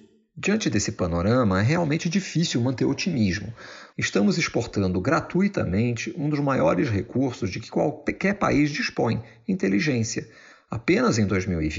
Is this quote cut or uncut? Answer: cut